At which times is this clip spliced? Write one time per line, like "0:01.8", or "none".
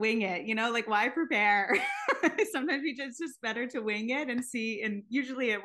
none